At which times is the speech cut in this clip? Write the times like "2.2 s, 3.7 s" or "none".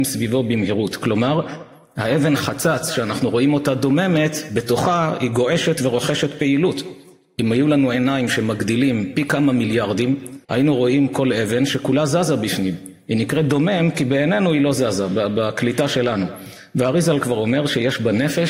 10.4 s